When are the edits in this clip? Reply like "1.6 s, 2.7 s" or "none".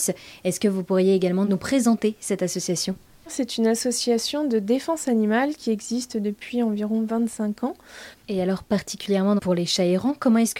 8.1 s, 9.4 s

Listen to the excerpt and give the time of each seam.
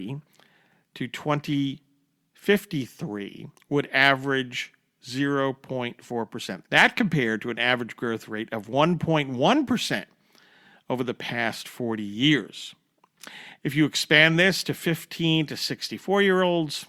6.6 s, 13.6 s

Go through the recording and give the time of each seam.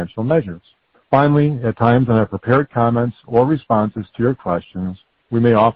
1.1 s

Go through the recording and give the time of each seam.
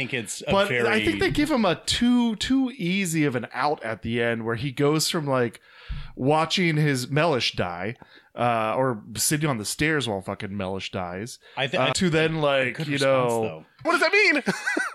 11.9 s, 13.8 s

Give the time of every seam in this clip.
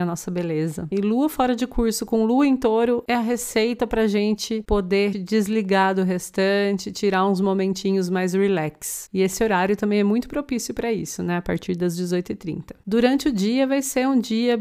0.9 s, 5.1 s

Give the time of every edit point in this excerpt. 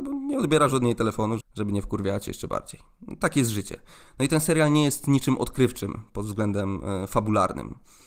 1.4 s

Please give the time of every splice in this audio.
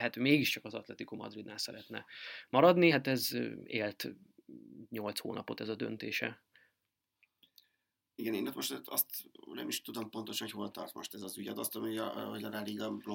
none

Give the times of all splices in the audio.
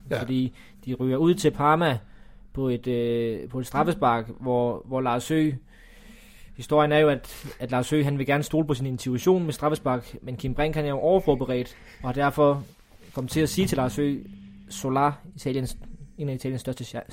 none

